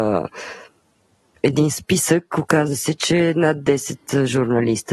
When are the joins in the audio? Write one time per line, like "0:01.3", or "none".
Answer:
none